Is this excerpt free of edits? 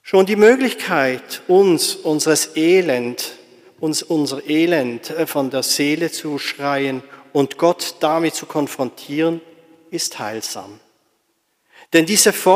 yes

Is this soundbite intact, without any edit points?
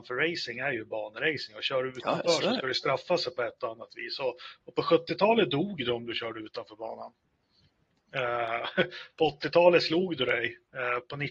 yes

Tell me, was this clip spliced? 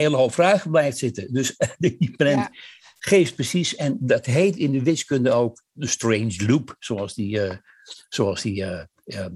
no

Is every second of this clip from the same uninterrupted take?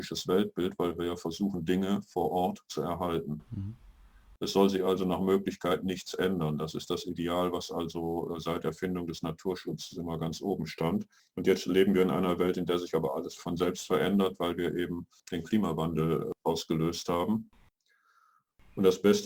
no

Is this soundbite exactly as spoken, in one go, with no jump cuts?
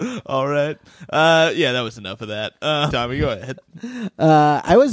no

